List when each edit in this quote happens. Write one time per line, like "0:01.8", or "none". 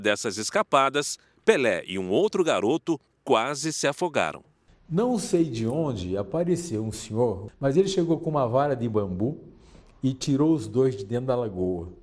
none